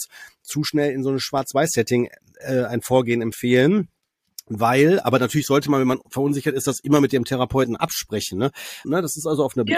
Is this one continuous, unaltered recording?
no; 1 cut; at 8.8 s

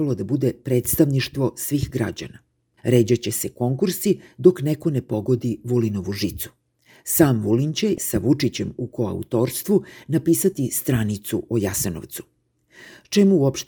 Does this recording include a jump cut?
yes; 1 cut; at 2.8 s

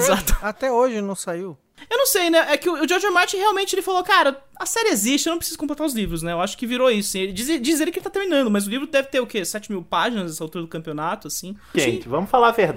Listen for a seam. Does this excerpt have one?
yes; 1 cut; at 11.7 s

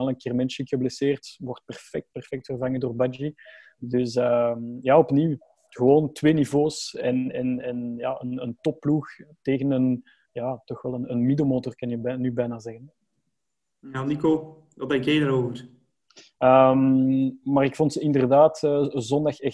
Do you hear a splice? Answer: yes; 1 cut; at 16.3 s

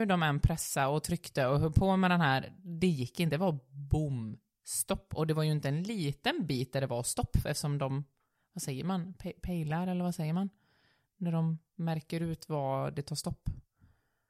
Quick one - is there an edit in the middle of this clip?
no; 0 cuts

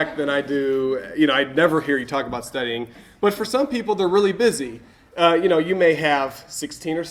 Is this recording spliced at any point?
no; 0 cuts

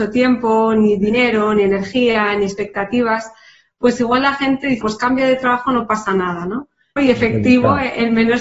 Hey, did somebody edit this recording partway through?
yes; 2 cuts; at 4.8 s, 7.0 s

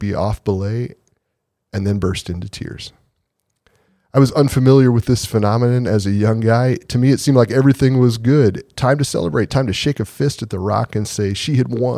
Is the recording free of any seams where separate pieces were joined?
yes; 0 cuts

